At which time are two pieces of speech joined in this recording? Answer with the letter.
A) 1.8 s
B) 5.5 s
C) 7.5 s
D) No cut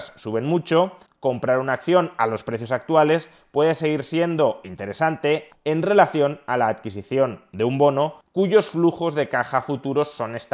B